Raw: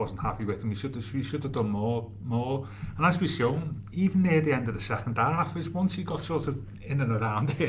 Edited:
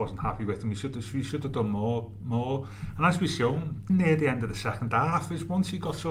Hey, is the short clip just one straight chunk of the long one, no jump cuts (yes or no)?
no